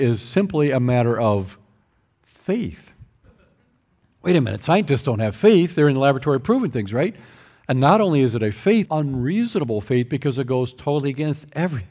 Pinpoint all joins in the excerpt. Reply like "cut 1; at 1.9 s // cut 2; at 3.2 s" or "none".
cut 1; at 7.6 s // cut 2; at 8.9 s